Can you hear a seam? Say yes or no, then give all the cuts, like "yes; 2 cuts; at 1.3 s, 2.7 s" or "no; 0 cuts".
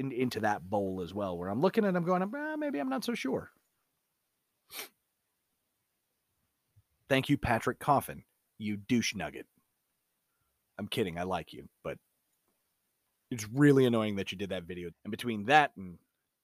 yes; 1 cut; at 14.9 s